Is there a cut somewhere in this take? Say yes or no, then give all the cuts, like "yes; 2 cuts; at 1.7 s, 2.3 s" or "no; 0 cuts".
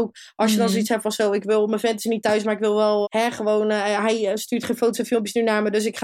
yes; 1 cut; at 3.0 s